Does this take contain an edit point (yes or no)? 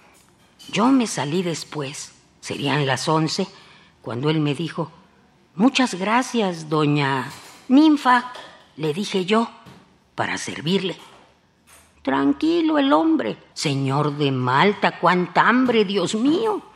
yes